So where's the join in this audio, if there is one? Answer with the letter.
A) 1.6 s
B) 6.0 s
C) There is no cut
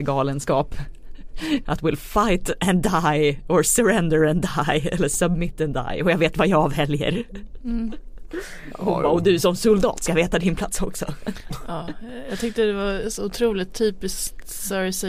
A